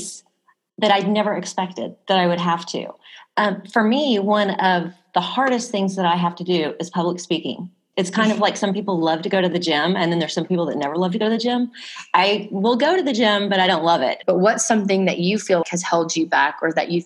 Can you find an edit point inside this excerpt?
yes; 3 cuts; at 7.9 s, 14.2 s, 15.6 s

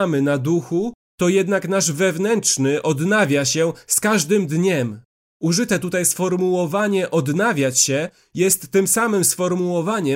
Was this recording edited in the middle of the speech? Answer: yes; 1 cut; at 1.0 s

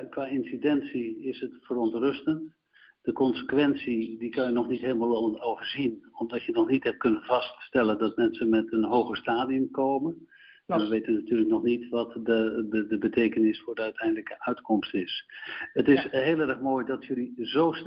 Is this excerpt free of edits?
yes; 0 cuts

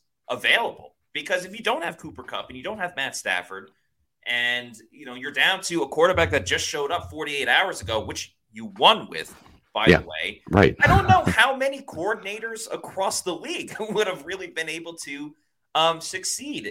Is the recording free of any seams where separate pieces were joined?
yes; 0 cuts

